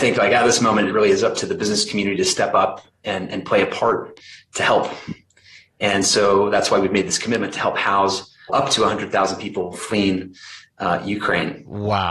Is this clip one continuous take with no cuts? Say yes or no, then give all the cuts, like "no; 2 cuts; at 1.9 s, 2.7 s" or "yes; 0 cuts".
yes; 0 cuts